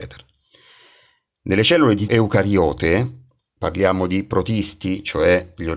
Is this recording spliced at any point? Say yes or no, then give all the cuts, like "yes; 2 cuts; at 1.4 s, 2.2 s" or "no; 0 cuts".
yes; 2 cuts; at 2.1 s, 3.6 s